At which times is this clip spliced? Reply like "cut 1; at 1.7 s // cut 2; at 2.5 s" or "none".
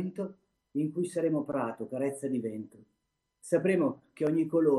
none